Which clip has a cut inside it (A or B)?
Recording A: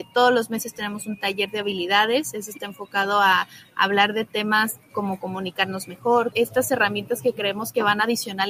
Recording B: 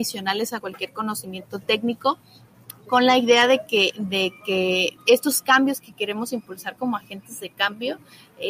A